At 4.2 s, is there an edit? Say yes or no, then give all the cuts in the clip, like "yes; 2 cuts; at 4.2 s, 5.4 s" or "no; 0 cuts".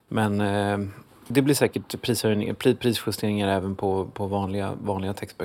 no; 1 cut; at 1.3 s